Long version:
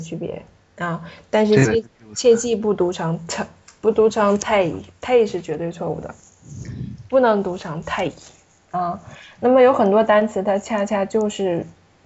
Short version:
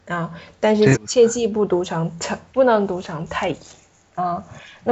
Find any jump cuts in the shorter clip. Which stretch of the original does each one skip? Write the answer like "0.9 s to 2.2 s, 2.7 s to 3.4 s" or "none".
1.7 s to 2.0 s, 3.6 s to 7.1 s